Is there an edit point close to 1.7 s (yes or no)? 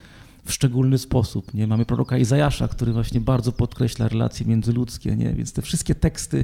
no